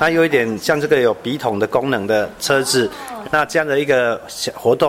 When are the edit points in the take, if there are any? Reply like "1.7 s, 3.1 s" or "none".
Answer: 3.2 s